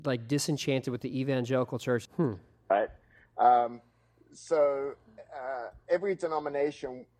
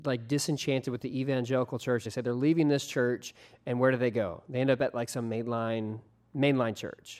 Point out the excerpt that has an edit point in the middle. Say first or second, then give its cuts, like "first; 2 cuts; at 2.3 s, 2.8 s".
first; 1 cut; at 2.1 s